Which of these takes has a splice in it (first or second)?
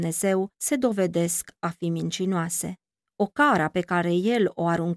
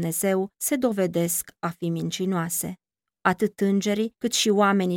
second